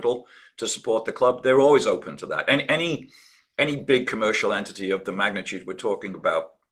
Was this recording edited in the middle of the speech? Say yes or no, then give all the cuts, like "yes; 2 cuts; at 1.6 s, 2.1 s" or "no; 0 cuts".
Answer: no; 0 cuts